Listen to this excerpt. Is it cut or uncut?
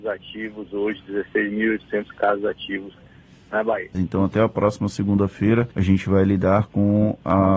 cut